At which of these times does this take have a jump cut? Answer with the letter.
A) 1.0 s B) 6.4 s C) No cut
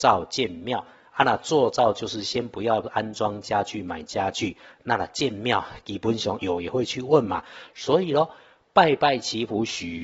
B